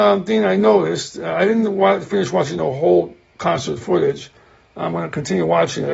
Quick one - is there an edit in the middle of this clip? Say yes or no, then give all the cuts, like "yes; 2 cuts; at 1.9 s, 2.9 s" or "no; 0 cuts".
no; 0 cuts